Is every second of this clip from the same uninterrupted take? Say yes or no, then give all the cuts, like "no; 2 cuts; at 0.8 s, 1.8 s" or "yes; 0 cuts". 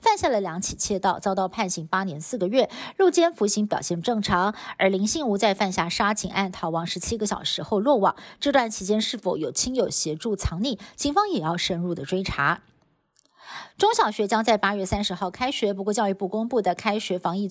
yes; 0 cuts